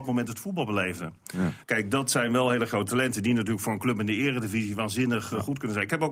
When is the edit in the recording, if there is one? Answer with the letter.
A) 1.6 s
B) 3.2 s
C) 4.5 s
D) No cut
A